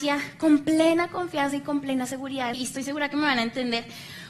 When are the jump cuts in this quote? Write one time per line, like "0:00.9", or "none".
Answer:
0:02.5

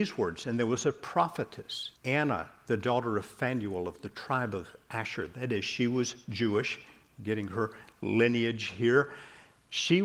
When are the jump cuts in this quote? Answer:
0:02.0

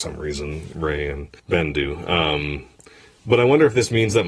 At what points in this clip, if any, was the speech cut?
0:01.4

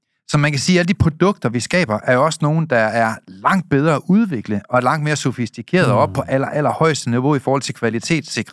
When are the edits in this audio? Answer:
none

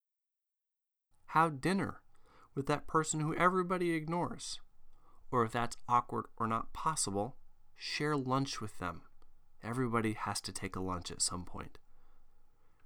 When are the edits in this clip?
0:01.1

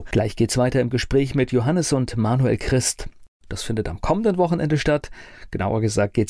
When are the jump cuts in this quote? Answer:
0:03.4

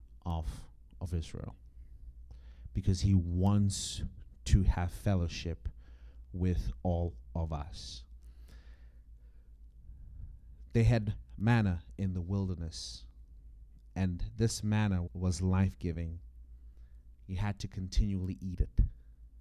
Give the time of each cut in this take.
0:15.1

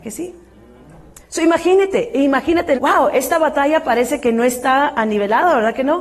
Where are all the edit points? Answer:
0:01.2
0:02.7

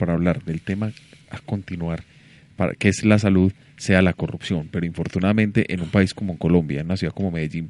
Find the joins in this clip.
none

